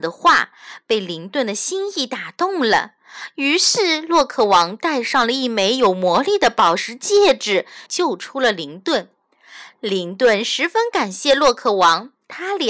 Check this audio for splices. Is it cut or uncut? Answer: cut